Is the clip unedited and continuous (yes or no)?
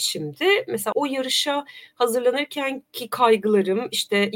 no